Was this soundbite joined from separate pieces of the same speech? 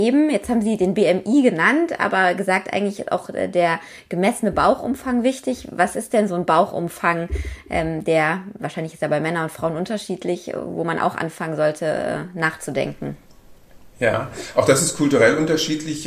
no; 0 cuts

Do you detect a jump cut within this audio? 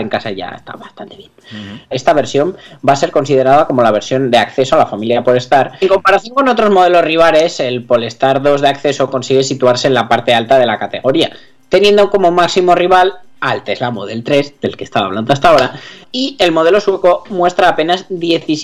yes; 3 cuts; at 1.9 s, 5.8 s, 16.0 s

